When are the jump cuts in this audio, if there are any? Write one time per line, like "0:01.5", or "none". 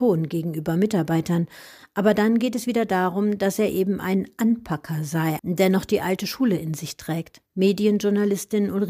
0:05.4
0:07.5